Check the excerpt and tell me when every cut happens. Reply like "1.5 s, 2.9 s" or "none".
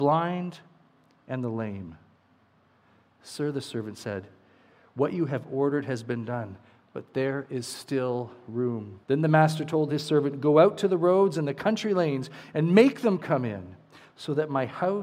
9.0 s